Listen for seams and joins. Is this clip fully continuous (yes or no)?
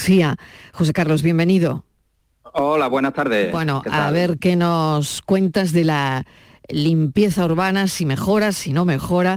yes